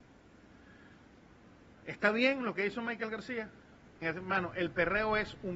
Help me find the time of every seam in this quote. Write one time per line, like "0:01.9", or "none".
0:04.0